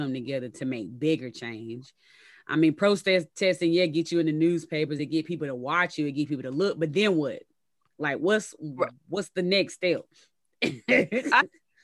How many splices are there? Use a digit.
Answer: 0